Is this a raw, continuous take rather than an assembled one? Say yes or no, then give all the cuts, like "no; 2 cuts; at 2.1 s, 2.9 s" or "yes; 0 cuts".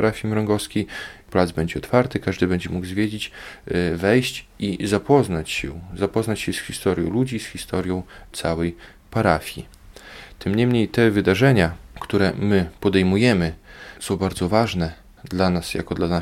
yes; 0 cuts